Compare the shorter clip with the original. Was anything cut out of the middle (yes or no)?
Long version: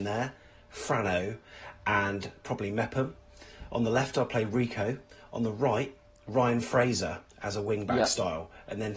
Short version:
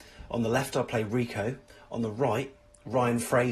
no